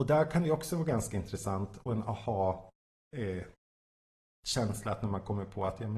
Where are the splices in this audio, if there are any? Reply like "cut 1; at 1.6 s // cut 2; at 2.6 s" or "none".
none